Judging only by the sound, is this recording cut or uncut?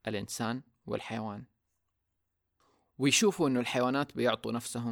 uncut